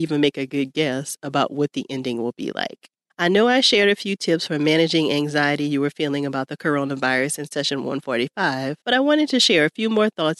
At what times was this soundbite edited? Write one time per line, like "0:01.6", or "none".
0:03.1
0:08.8